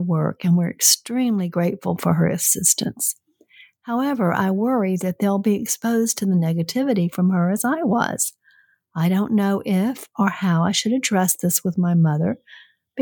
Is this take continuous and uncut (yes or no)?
yes